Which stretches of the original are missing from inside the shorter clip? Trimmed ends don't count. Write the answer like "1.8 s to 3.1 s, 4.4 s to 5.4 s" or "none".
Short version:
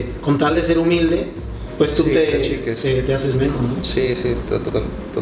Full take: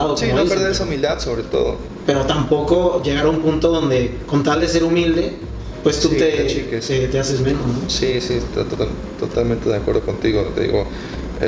none